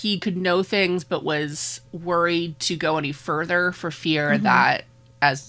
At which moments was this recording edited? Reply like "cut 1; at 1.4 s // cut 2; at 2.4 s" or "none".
cut 1; at 1.9 s